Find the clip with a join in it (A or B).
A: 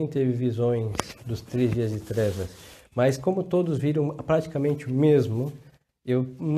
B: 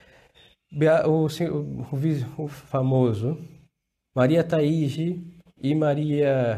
B